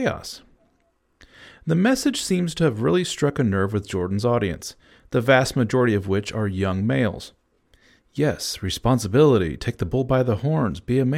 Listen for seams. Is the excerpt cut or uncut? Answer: uncut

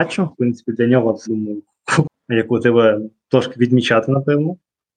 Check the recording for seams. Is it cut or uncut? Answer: cut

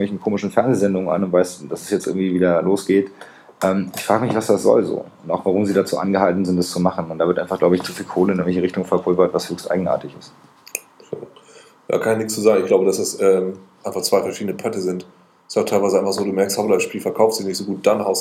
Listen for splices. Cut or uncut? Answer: uncut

